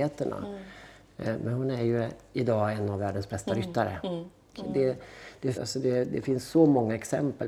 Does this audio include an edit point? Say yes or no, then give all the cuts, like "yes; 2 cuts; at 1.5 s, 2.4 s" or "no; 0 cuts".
yes; 2 cuts; at 4.5 s, 5.5 s